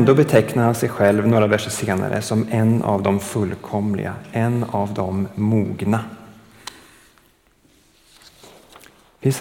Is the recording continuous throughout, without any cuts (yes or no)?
yes